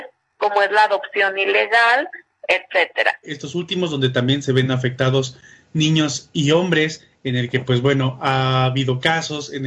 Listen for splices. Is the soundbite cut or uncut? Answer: cut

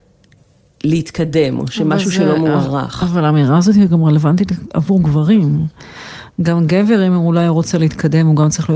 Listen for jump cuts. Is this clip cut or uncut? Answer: uncut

